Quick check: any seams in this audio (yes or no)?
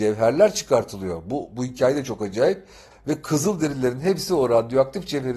yes